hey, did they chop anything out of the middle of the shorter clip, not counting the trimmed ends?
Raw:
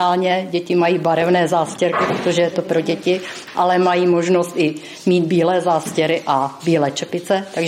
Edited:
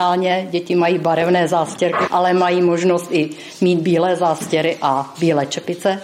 yes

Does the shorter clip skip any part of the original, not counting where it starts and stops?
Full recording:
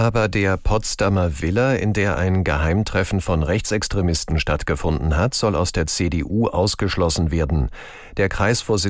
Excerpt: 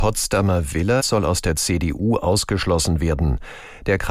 yes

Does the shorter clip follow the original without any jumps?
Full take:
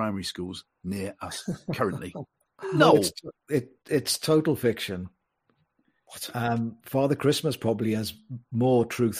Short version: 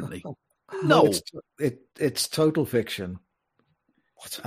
yes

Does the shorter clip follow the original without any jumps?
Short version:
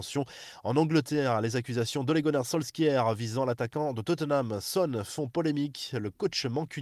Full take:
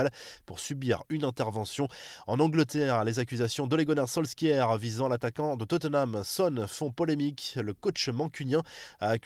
yes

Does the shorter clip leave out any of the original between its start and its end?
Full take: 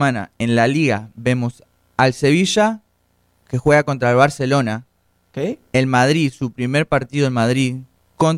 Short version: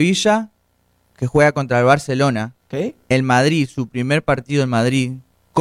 yes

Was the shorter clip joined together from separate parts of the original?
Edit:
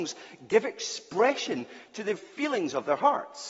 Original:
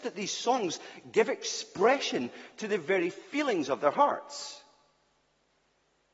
yes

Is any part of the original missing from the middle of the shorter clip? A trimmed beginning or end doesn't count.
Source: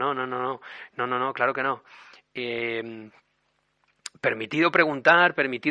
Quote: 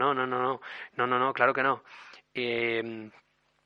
no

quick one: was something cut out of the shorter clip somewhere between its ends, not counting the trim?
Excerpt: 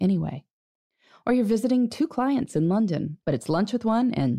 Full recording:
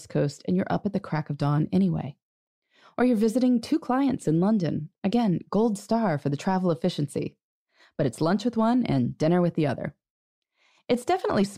yes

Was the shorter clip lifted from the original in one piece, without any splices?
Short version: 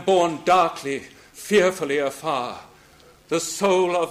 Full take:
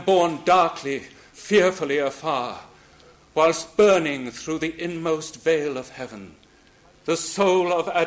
no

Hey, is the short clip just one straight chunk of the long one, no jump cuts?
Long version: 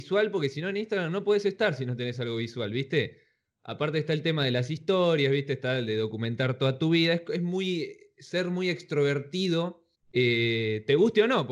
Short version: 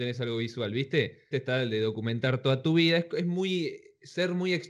no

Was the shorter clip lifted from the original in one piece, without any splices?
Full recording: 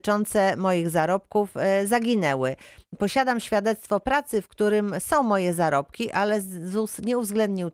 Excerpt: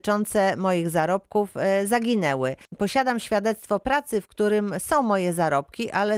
no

